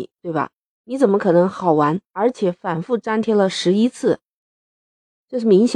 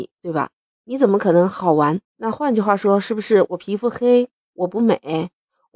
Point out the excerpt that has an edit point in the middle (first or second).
second